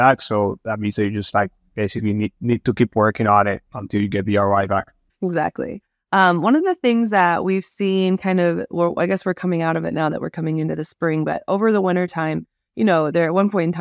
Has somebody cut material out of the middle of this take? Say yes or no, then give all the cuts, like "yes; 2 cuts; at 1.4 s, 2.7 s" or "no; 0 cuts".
no; 0 cuts